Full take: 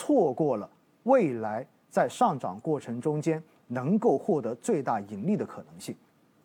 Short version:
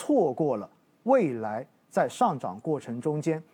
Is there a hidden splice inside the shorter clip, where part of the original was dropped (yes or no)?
no